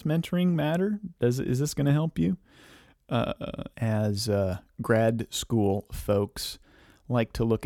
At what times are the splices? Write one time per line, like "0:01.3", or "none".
0:03.7